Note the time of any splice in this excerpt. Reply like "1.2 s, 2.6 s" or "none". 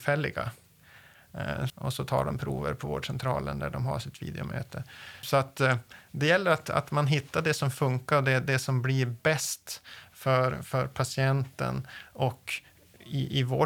1.7 s, 5.2 s